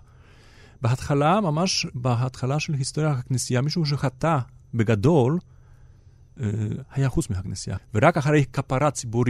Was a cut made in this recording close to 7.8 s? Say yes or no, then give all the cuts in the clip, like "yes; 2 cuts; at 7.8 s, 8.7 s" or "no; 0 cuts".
yes; 1 cut; at 7.8 s